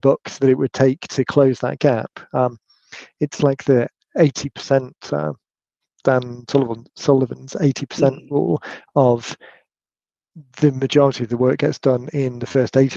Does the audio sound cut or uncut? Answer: uncut